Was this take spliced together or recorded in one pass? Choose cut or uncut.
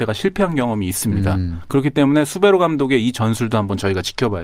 uncut